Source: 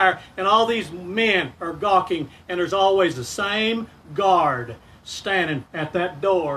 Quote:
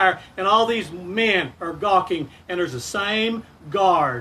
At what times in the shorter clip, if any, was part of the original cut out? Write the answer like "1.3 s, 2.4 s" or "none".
2.7 s